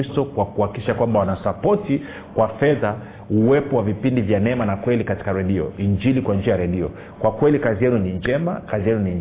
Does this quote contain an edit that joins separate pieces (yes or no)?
no